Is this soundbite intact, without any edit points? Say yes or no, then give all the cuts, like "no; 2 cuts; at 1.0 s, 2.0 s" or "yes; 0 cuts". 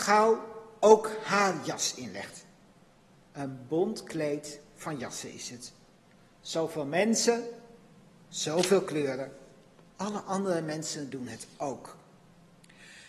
no; 1 cut; at 9.9 s